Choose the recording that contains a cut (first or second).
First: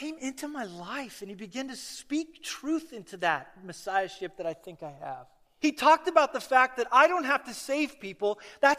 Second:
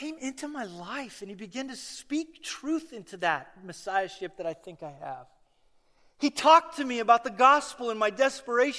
first